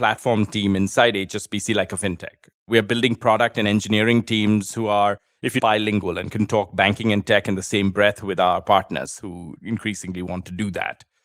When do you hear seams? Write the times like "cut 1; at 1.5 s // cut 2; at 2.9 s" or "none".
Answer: cut 1; at 5.6 s